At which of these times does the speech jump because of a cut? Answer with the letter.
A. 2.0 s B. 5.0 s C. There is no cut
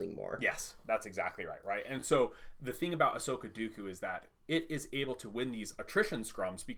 C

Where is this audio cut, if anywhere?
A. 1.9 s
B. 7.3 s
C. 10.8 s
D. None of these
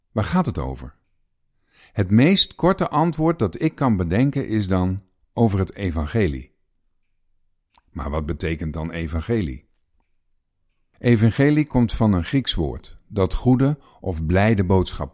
D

